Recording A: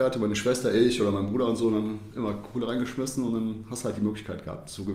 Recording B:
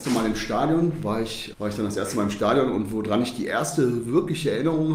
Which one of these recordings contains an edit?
B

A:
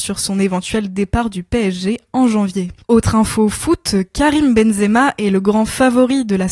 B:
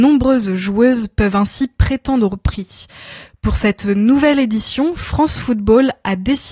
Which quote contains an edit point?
A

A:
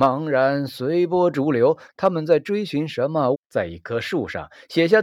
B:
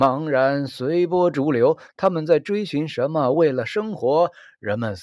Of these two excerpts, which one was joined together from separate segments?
A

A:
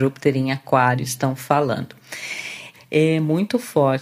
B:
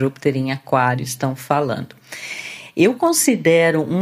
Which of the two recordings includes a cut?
A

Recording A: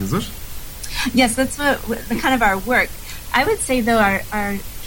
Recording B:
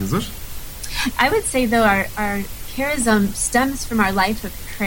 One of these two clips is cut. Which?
B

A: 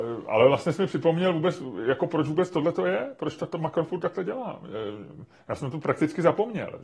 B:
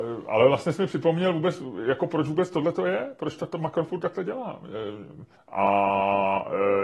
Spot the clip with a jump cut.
B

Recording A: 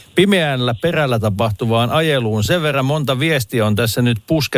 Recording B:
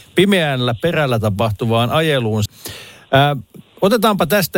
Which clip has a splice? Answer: B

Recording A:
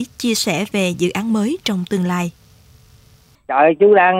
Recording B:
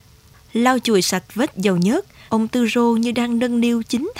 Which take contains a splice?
B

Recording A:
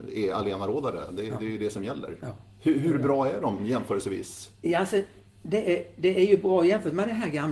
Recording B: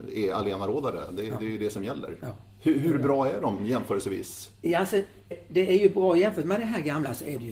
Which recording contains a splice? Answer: B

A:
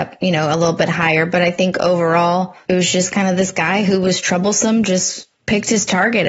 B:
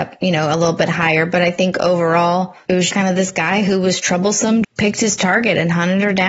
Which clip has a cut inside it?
B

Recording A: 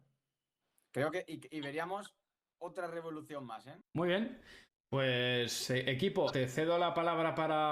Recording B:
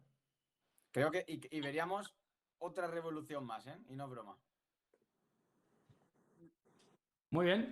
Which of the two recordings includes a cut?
A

